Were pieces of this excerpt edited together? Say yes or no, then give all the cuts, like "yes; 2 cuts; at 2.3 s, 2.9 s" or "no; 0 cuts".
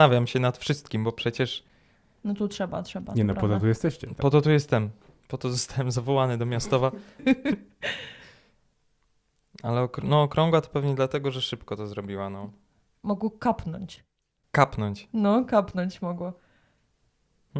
yes; 1 cut; at 7.2 s